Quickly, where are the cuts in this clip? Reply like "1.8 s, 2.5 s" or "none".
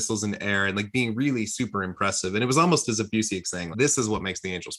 3.7 s